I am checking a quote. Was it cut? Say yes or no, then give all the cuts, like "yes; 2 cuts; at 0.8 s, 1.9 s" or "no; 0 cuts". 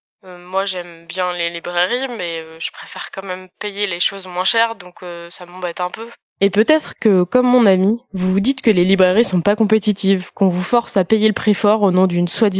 no; 0 cuts